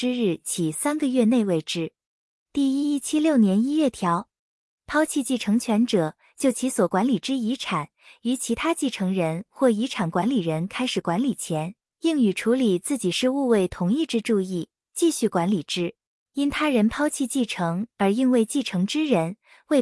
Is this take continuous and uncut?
no; 1 cut; at 16.1 s

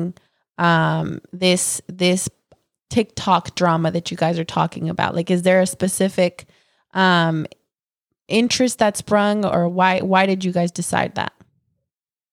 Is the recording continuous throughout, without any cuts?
yes; 0 cuts

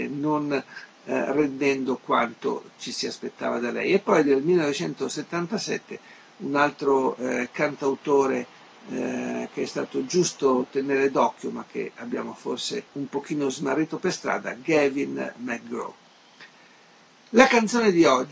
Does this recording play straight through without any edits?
no; 1 cut; at 12.9 s

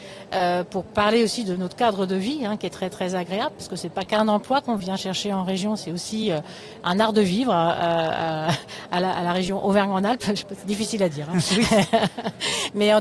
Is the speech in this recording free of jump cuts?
yes; 0 cuts

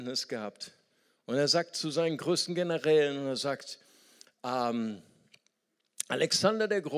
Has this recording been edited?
no; 0 cuts

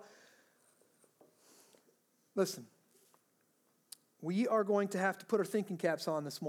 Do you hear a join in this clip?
no; 0 cuts

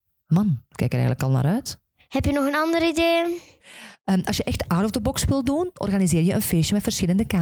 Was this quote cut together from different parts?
yes; 1 cut; at 3.6 s

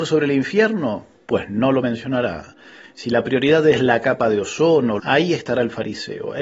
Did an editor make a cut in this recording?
yes; 2 cuts; at 2.8 s, 5.0 s

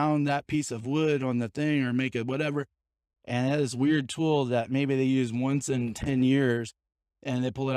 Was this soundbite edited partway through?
no; 0 cuts

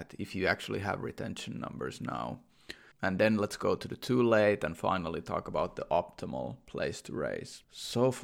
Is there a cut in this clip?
yes; 1 cut; at 2.9 s

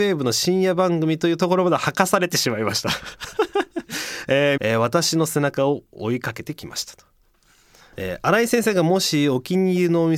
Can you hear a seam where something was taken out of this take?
yes; 1 cut; at 4.6 s

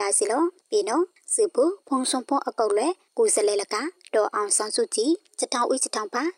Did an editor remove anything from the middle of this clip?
no; 0 cuts

